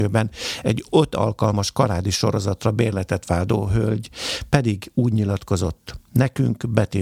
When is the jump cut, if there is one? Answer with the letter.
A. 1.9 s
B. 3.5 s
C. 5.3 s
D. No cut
D